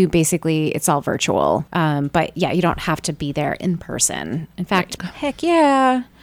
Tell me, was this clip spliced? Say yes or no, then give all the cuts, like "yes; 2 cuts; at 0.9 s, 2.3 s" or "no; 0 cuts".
yes; 2 cuts; at 1.7 s, 5.0 s